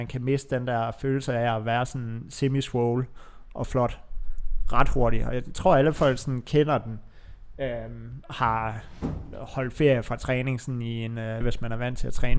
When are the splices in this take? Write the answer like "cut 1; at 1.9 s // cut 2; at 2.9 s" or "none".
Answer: cut 1; at 8.2 s // cut 2; at 11.4 s